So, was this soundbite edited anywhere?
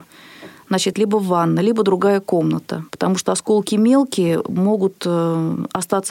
yes; 2 cuts; at 0.9 s, 2.9 s

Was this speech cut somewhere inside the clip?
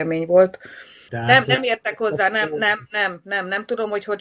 yes; 1 cut; at 1.1 s

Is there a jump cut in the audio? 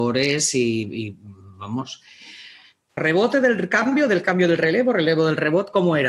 yes; 1 cut; at 3.0 s

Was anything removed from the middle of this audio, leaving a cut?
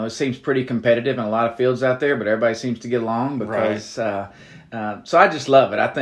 no; 0 cuts

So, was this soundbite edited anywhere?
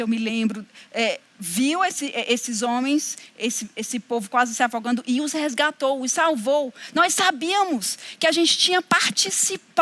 no; 0 cuts

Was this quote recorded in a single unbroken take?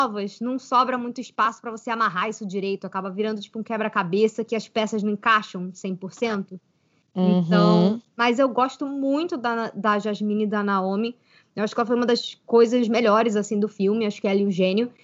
yes; 0 cuts

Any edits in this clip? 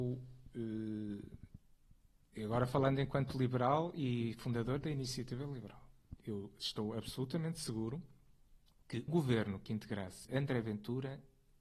yes; 2 cuts; at 9.1 s, 10.2 s

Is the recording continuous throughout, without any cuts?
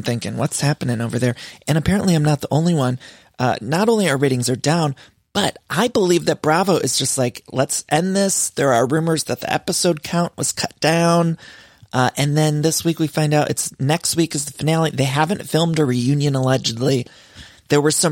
yes; 0 cuts

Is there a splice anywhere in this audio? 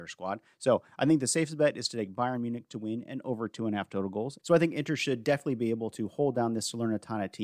yes; 1 cut; at 4.4 s

